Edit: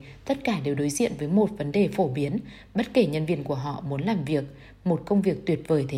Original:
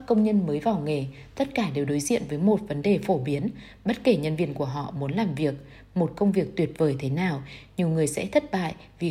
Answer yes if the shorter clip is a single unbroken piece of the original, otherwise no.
yes